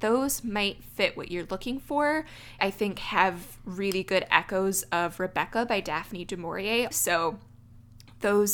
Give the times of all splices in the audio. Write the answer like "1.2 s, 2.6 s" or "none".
2.6 s, 6.9 s